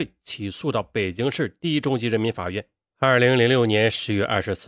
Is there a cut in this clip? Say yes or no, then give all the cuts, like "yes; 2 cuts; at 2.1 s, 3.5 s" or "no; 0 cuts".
yes; 1 cut; at 2.8 s